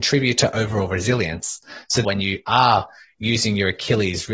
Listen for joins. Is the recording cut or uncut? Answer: cut